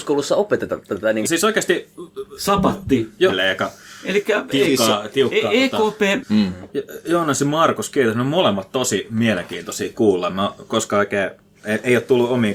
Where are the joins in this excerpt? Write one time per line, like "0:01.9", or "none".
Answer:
0:01.2
0:03.3
0:06.2